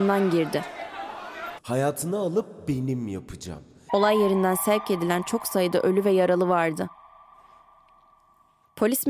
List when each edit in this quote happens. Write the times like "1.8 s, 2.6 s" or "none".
1.6 s, 3.9 s